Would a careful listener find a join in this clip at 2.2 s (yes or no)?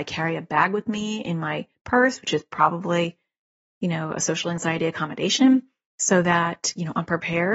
no